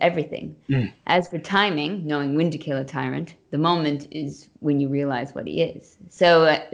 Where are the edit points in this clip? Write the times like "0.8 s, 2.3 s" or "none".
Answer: none